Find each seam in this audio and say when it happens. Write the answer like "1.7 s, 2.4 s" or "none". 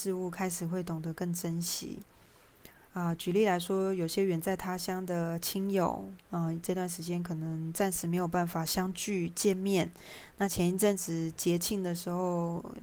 none